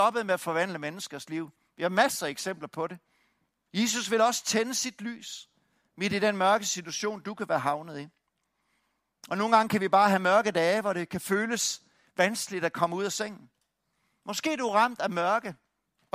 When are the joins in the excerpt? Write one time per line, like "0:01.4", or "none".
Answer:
0:03.7